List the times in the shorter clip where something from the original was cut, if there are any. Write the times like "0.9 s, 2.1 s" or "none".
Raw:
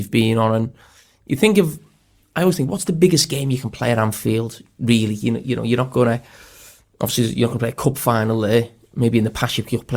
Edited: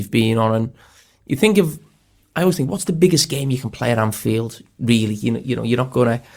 none